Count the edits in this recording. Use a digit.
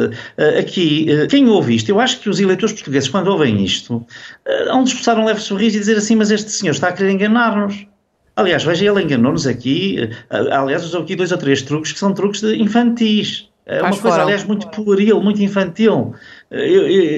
1